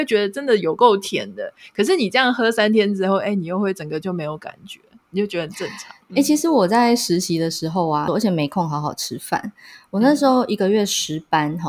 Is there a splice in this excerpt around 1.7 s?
no; 2 cuts; at 6.1 s, 8.1 s

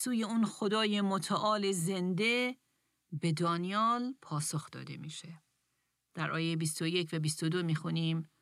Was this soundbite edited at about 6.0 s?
no; 0 cuts

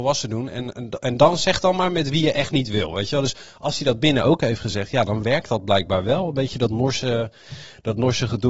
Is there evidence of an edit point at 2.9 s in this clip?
no; 0 cuts

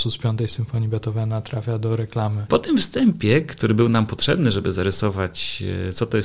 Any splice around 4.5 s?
no; 1 cut; at 2.5 s

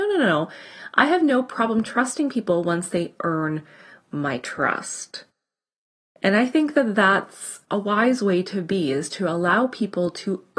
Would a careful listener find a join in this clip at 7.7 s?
yes; 1 cut; at 7.7 s

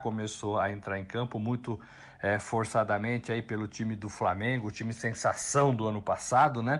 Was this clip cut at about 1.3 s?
no; 0 cuts

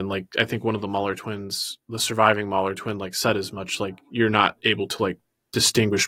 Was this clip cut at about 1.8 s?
no; 0 cuts

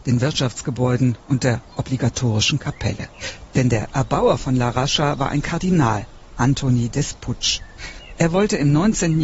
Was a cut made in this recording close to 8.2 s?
no; 0 cuts

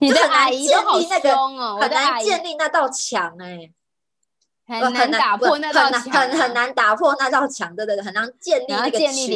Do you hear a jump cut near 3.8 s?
no; 0 cuts

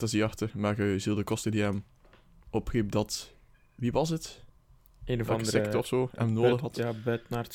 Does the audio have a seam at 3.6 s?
no; 0 cuts

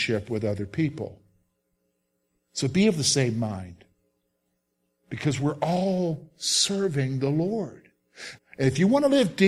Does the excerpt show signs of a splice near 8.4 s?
yes; 1 cut; at 8.4 s

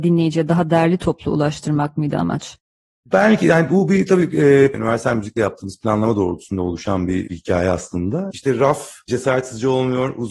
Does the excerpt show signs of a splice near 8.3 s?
no; 1 cut; at 4.7 s

